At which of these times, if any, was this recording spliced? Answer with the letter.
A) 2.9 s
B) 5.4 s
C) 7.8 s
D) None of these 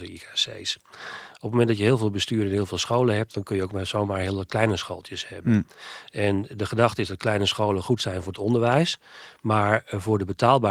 D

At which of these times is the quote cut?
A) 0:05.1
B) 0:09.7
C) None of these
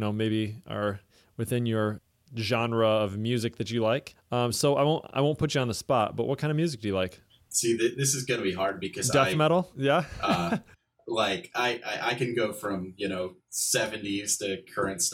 B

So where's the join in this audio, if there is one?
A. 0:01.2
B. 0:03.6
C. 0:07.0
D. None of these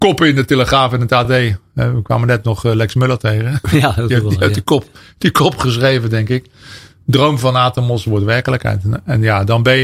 D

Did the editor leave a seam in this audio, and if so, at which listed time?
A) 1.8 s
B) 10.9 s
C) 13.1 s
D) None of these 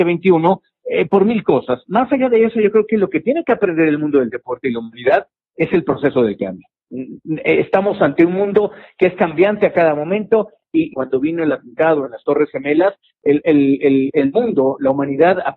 B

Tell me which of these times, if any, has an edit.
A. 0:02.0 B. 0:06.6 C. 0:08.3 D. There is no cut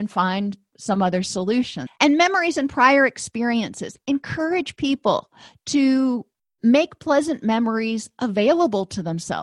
A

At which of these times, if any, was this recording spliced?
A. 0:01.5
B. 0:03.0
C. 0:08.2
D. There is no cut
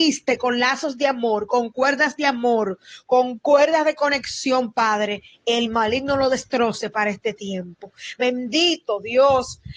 C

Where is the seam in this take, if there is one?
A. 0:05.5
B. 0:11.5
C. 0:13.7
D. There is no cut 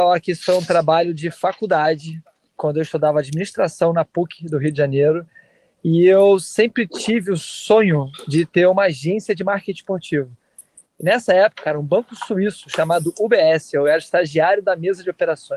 B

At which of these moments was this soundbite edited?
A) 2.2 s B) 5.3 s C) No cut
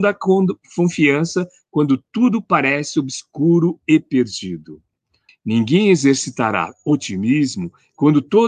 B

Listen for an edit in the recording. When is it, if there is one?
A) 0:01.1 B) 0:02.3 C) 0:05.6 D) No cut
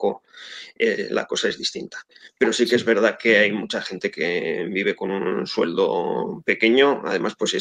D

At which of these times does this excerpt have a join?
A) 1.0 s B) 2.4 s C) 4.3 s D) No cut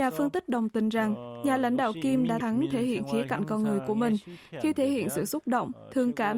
B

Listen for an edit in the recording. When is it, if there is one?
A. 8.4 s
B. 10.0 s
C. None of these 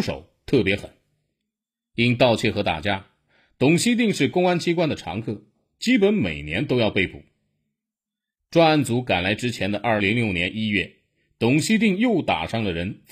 B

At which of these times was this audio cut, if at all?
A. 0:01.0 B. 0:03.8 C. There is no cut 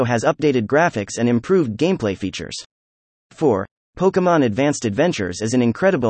B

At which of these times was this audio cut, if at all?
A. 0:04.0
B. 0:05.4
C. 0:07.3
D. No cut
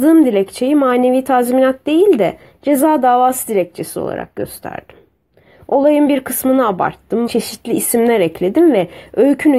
C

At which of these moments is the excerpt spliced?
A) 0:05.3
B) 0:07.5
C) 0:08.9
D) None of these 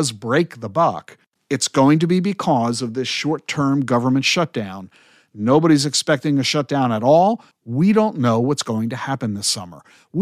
B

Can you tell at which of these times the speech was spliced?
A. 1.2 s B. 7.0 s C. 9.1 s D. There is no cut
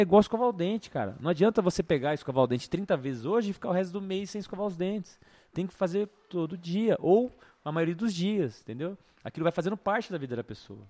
D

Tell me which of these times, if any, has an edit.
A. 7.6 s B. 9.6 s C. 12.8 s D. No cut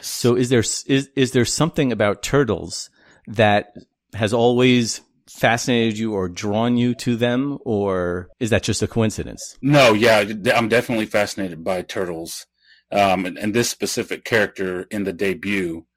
B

